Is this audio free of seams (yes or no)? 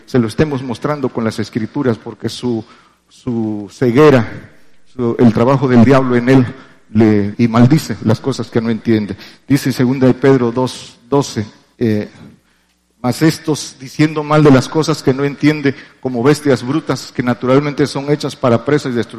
no